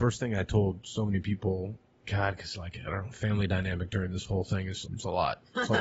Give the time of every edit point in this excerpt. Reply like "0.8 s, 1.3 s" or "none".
1.9 s, 4.8 s